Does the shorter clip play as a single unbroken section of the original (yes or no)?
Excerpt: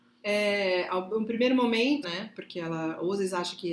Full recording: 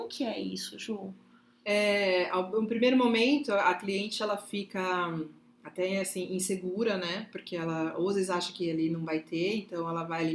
no